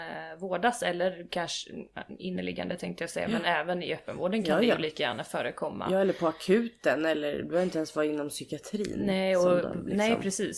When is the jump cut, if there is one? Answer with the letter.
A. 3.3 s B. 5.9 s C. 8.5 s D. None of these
D